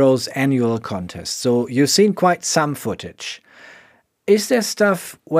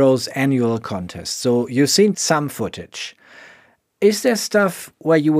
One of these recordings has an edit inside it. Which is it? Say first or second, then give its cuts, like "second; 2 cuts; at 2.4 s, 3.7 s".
second; 1 cut; at 2.1 s